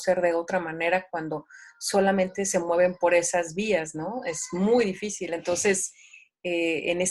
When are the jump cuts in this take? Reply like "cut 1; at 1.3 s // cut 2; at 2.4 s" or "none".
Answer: none